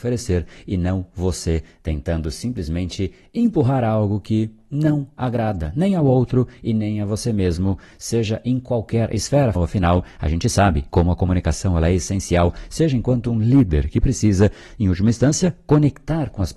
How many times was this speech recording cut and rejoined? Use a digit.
1